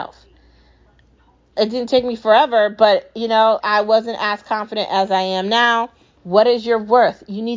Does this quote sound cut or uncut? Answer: cut